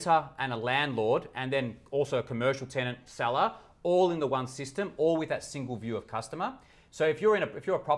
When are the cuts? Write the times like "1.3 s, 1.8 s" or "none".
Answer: none